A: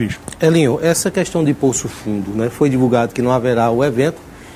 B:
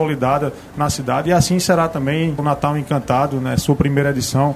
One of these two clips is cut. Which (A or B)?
B